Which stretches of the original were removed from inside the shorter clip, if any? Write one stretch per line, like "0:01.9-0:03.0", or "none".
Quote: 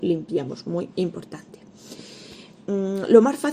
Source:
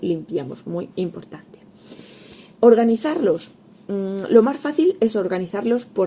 0:02.6-0:03.8